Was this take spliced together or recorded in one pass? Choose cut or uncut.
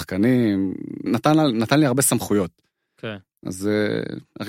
cut